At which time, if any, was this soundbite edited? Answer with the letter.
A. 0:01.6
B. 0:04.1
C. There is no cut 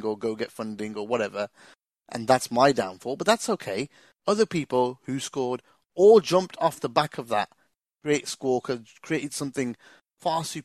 C